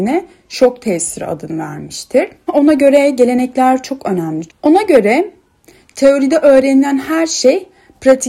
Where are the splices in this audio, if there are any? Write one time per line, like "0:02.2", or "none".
0:02.5
0:04.5